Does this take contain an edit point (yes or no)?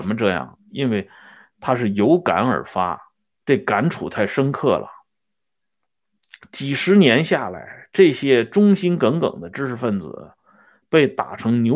no